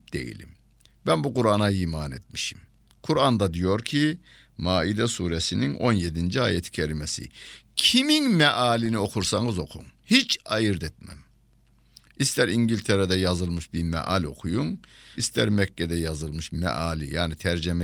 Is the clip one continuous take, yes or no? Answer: no